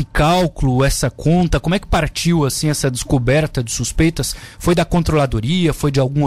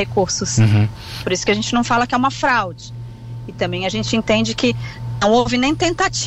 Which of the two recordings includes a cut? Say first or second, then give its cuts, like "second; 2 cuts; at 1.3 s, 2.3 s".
second; 1 cut; at 1.2 s